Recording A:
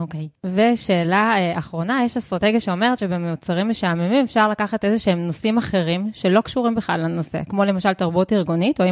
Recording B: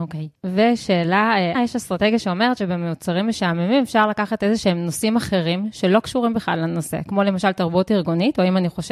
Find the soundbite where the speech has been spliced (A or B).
B